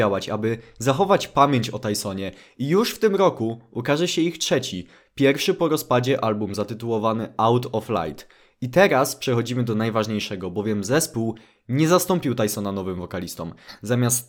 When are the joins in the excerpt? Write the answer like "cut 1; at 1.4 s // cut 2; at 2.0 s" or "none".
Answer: none